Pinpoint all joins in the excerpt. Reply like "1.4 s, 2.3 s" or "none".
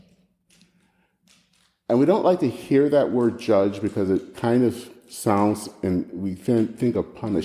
none